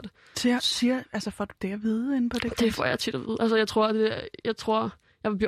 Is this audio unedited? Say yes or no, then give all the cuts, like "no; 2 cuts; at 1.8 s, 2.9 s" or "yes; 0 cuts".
yes; 0 cuts